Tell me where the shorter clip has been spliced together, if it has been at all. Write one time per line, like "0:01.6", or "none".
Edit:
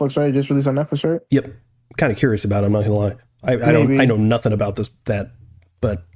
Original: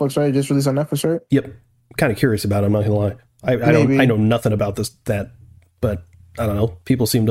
none